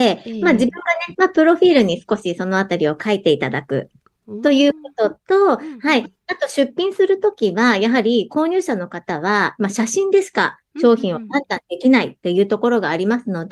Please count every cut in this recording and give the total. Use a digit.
1